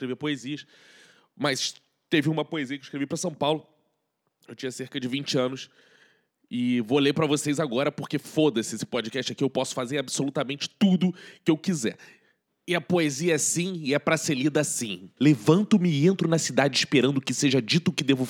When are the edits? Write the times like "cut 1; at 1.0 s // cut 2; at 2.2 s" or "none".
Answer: cut 1; at 15.2 s